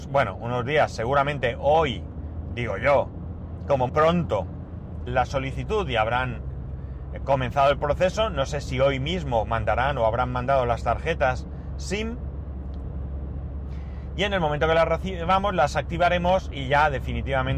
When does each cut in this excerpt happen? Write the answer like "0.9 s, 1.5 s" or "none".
3.9 s, 5.1 s